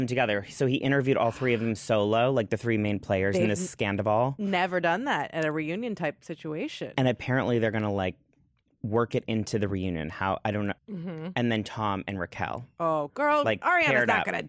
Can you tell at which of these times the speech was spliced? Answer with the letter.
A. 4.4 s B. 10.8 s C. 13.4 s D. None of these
B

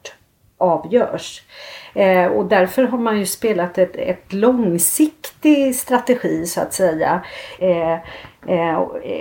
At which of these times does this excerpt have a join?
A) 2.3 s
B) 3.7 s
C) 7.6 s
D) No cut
C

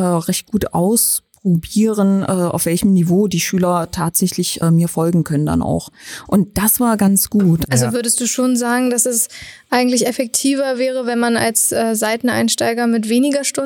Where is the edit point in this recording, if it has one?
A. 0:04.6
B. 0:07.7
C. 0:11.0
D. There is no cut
A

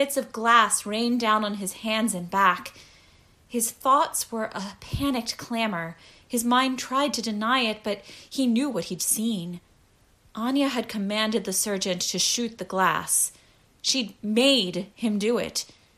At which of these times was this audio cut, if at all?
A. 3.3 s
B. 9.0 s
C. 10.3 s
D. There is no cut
B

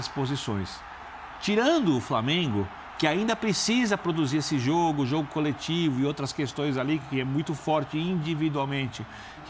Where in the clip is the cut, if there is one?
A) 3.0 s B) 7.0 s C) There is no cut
C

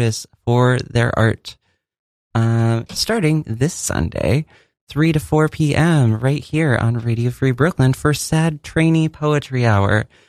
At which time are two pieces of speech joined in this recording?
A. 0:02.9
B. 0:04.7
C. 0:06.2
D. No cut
A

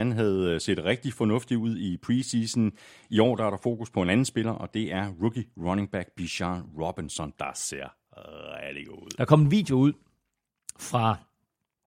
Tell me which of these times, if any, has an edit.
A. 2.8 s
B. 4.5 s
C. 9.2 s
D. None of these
C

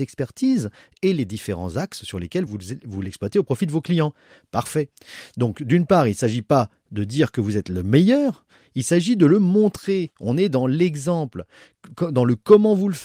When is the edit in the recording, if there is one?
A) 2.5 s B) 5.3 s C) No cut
C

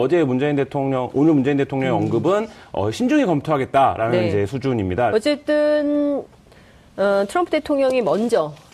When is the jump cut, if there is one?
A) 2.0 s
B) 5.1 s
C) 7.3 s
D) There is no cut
B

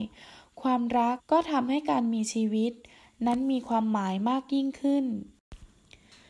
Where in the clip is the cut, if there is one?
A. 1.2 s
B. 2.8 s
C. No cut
A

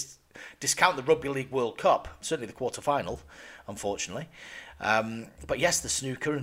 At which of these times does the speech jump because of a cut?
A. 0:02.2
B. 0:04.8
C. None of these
A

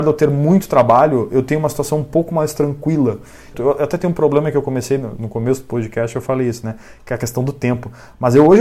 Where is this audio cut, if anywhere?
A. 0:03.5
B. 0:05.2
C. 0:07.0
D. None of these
A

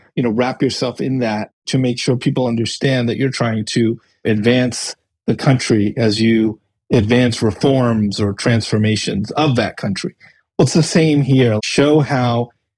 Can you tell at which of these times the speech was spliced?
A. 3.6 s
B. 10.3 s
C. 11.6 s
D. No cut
C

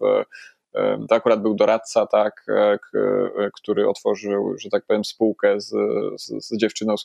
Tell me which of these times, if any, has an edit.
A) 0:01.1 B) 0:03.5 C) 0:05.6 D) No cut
D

